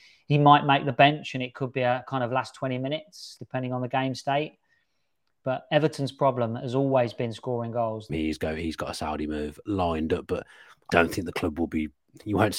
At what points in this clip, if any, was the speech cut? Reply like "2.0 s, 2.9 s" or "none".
3.4 s, 8.1 s, 10.9 s